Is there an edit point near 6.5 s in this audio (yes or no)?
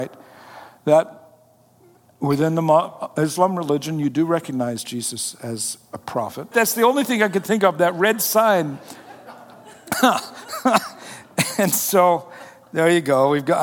yes